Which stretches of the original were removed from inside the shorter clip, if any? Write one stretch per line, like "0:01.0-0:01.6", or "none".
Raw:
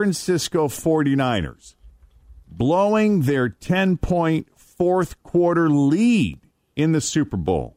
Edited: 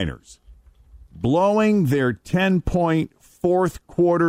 none